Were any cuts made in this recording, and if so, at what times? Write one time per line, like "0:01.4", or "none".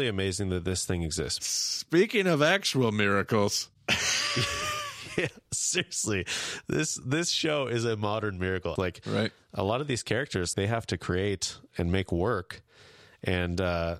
0:08.8
0:10.5